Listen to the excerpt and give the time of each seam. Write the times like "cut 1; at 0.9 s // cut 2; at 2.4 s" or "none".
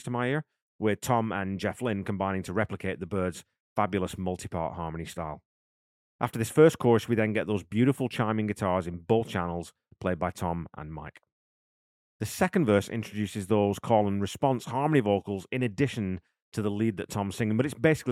none